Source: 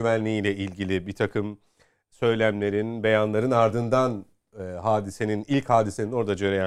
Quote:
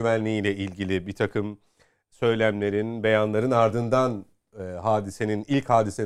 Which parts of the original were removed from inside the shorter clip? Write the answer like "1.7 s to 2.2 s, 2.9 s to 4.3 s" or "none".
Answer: none